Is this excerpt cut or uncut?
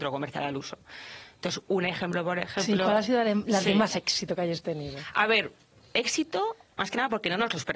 uncut